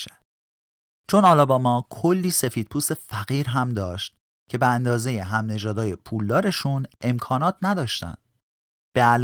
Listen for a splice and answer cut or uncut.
uncut